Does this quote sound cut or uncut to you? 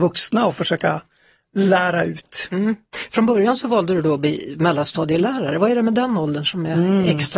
uncut